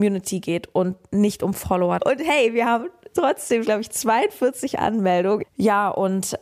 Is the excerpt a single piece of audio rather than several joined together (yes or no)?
no